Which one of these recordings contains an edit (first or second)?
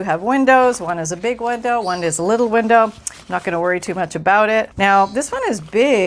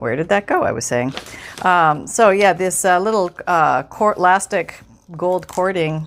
first